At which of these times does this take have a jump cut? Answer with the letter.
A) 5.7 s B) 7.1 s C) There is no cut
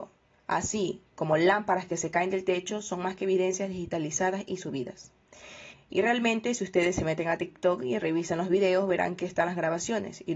A